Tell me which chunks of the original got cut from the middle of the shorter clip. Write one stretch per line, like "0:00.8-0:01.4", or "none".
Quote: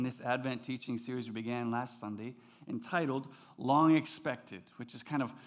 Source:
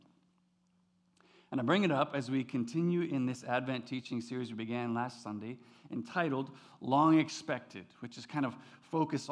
none